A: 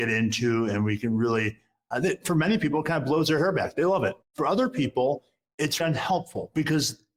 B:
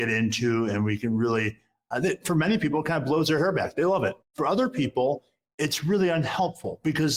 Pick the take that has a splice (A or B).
A